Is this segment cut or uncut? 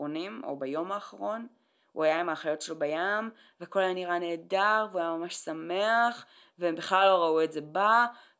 uncut